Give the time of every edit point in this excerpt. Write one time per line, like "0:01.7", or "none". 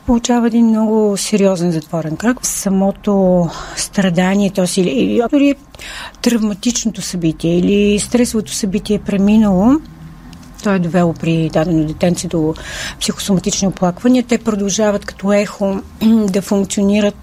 0:02.4
0:05.3
0:10.6